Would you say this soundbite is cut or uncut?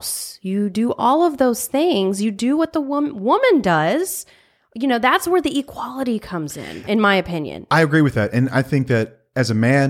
uncut